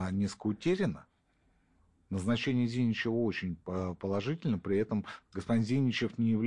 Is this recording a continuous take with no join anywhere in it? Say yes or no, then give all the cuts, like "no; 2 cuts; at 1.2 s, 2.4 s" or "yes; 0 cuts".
yes; 0 cuts